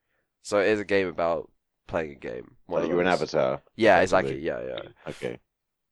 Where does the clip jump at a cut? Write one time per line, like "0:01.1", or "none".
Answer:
none